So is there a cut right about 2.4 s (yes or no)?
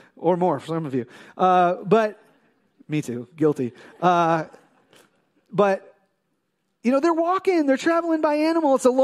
no